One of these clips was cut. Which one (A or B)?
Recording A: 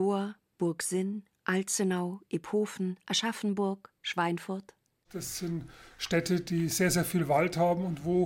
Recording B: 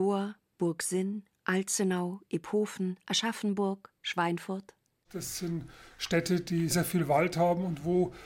B